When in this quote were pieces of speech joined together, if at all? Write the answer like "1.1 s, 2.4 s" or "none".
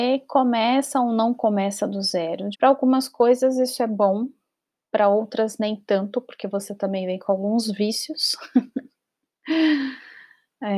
2.5 s